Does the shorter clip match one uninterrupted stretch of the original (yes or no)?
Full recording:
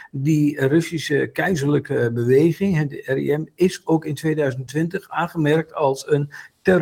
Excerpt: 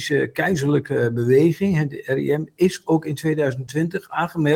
yes